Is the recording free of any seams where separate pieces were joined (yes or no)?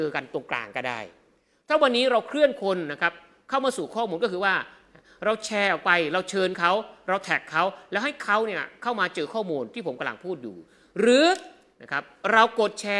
yes